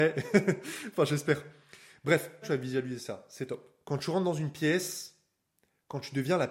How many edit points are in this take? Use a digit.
2